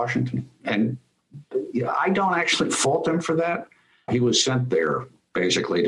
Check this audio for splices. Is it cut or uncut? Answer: cut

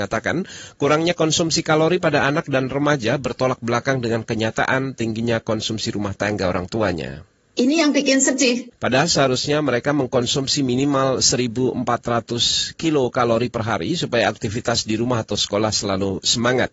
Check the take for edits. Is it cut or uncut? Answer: cut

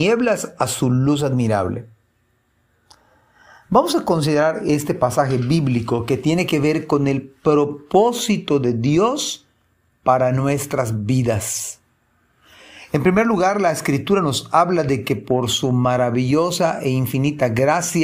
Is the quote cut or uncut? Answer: uncut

